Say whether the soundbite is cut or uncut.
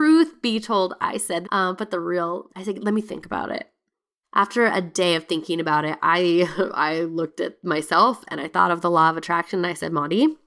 cut